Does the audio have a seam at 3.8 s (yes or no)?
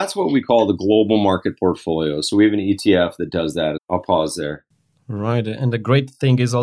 yes